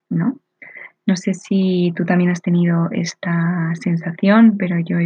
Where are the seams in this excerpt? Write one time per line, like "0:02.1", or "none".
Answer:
none